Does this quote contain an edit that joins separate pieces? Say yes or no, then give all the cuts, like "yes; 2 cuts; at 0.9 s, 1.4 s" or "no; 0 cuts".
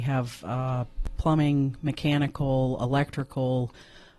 no; 0 cuts